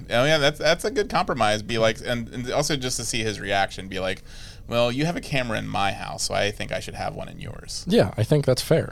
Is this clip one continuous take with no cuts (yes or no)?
yes